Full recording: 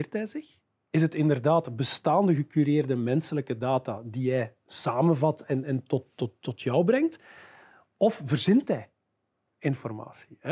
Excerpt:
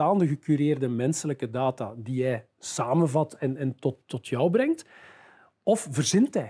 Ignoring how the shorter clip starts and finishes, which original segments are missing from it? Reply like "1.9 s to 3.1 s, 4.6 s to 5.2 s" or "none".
6.1 s to 6.4 s